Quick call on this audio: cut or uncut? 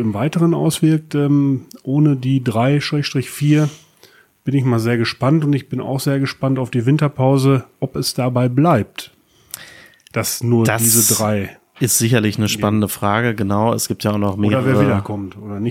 uncut